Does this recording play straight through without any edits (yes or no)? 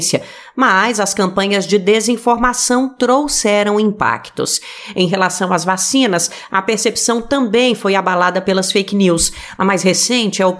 no